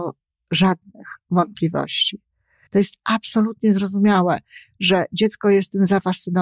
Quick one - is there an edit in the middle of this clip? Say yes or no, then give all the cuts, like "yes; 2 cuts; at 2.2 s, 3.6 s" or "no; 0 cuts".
yes; 1 cut; at 2.7 s